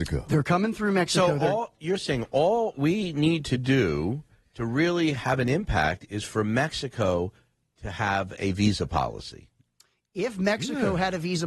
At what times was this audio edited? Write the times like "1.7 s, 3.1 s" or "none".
none